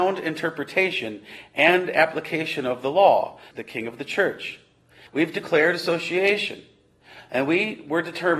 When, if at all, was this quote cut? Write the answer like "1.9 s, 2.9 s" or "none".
3.5 s, 5.1 s